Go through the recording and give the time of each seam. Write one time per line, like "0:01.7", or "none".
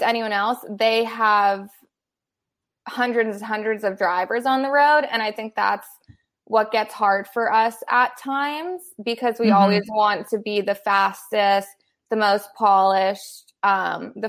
none